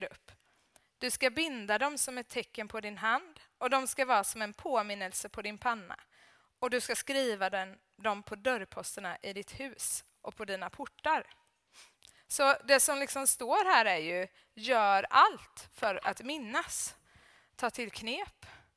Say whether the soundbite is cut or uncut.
uncut